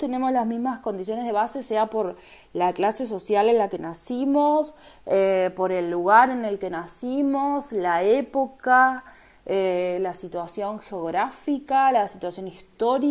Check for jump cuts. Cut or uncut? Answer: uncut